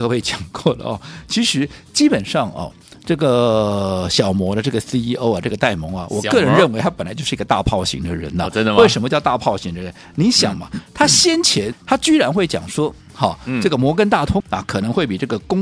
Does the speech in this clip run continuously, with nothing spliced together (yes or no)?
no